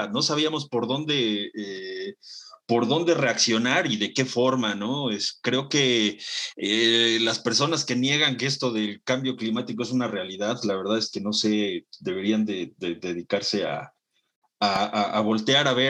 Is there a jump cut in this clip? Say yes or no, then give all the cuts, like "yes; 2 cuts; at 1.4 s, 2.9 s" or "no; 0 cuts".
no; 0 cuts